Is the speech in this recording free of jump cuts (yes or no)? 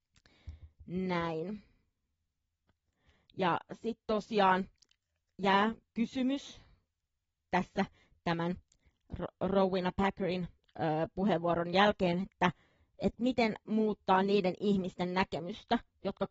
yes